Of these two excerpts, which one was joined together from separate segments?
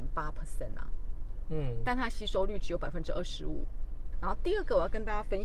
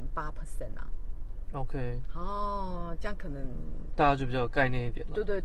first; 2 cuts; at 1.5 s, 4.1 s

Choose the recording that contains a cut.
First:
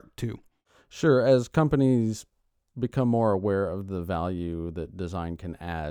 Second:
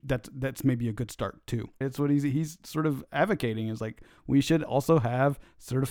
second; 1 cut; at 1.8 s

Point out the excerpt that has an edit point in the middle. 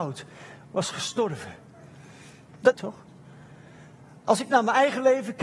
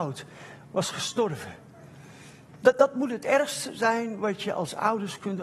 first; 1 cut; at 2.7 s

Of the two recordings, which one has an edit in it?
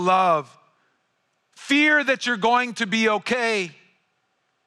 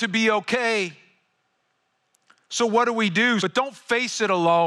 second; 1 cut; at 3.4 s

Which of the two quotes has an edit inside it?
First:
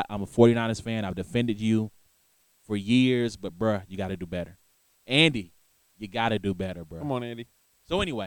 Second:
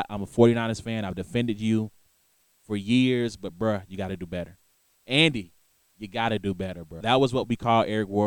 second; 1 cut; at 7.0 s

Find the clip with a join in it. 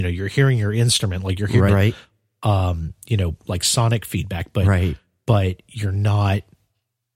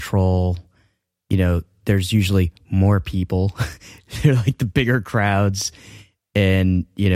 first; 1 cut; at 1.7 s

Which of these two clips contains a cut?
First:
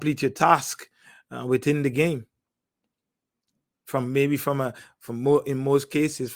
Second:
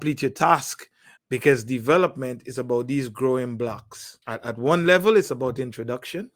second; 2 cuts; at 1.2 s, 4.2 s

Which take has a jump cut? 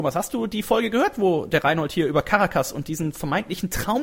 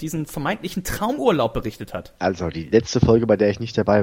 second; 1 cut; at 2.2 s

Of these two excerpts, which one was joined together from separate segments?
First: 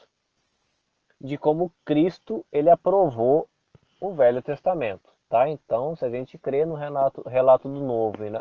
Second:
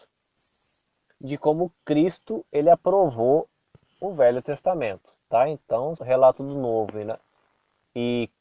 second; 1 cut; at 6.0 s

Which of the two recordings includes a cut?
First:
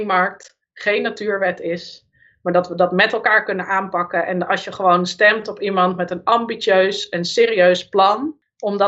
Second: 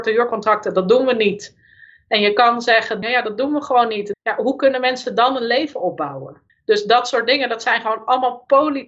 second; 3 cuts; at 3.0 s, 4.1 s, 6.5 s

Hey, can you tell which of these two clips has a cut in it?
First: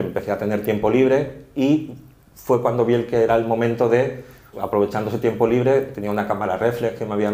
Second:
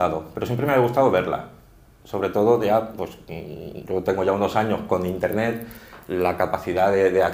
first; 1 cut; at 4.5 s

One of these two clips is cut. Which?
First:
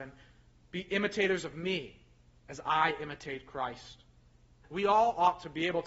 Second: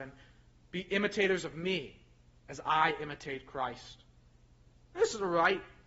first; 1 cut; at 4.6 s

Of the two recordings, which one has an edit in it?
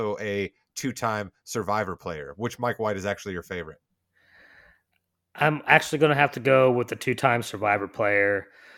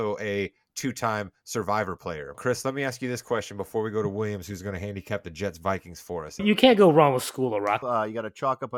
second; 3 cuts; at 2.3 s, 6.4 s, 7.8 s

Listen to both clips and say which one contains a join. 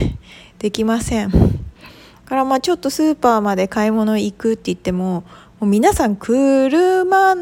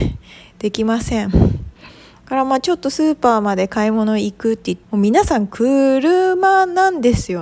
second; 1 cut; at 4.8 s

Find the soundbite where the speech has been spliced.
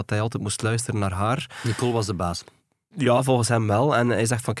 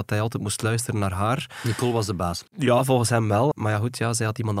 second; 2 cuts; at 2.5 s, 3.5 s

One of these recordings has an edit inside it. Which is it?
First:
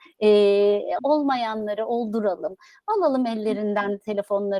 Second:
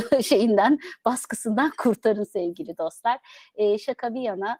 first; 1 cut; at 1.0 s

